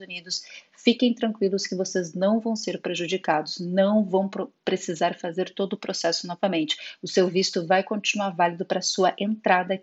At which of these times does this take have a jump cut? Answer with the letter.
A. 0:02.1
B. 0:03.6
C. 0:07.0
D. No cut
D